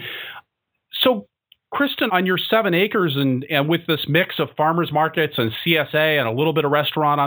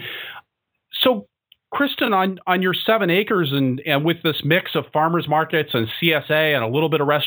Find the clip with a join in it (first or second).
first